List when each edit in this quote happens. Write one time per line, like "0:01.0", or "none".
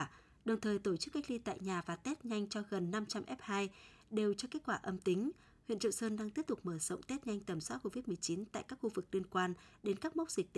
none